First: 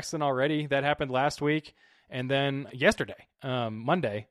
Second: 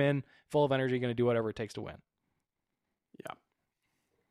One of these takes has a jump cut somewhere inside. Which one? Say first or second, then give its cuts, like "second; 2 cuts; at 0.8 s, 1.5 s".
first; 1 cut; at 2.7 s